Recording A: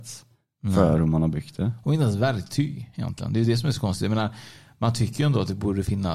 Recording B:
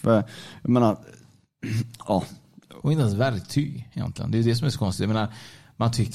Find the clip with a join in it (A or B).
B